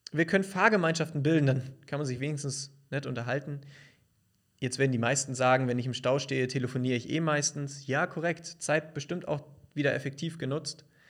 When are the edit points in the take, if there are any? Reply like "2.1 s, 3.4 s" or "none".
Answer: none